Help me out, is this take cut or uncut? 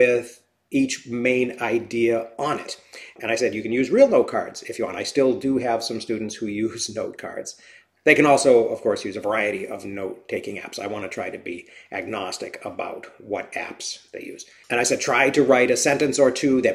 uncut